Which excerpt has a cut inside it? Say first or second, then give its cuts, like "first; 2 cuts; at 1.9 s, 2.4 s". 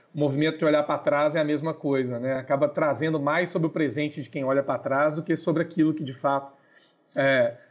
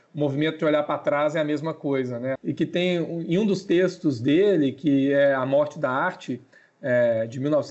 second; 1 cut; at 2.4 s